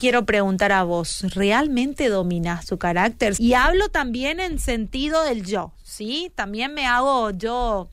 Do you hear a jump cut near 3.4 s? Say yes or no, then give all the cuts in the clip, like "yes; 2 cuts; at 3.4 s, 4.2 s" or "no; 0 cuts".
yes; 1 cut; at 3.4 s